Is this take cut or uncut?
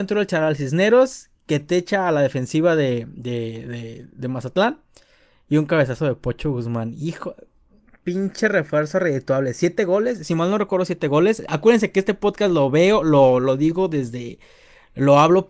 uncut